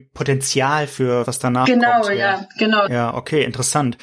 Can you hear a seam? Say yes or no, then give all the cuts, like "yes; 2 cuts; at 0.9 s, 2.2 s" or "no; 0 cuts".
yes; 2 cuts; at 1.2 s, 2.9 s